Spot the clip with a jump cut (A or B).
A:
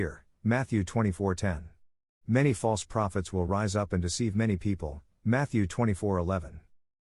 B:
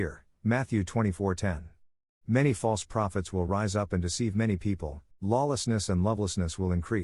B